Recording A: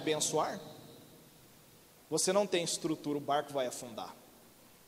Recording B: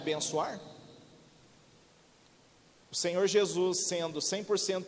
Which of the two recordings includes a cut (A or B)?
A